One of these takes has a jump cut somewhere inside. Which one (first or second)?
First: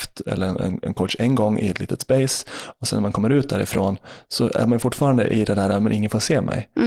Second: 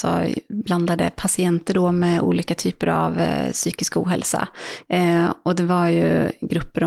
second